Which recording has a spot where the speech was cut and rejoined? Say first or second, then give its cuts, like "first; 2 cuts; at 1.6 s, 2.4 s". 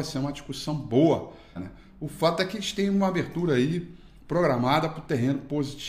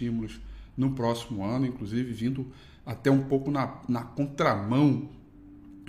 first; 1 cut; at 1.5 s